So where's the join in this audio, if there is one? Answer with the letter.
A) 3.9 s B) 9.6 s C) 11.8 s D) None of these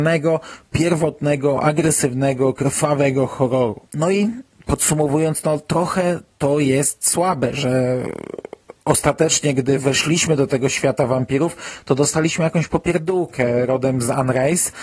A